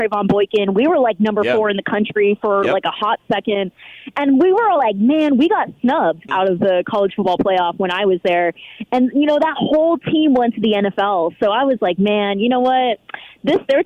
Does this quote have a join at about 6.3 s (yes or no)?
yes